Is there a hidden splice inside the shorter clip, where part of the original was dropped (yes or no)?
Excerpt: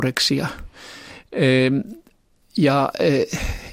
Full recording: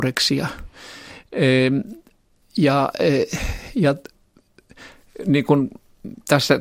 no